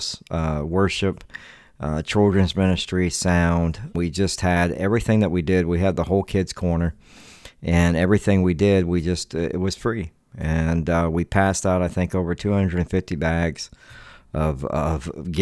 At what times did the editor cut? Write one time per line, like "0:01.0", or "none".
0:03.9

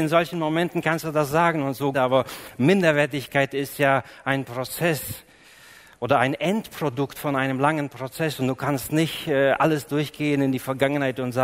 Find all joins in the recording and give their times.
0:01.9

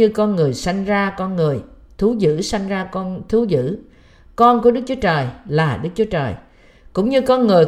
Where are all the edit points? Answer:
none

